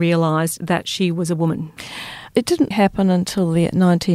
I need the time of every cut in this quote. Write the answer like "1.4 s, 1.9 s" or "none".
2.7 s